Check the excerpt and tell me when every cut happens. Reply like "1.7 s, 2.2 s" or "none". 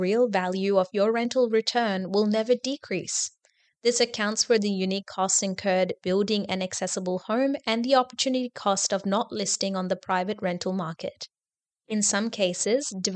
none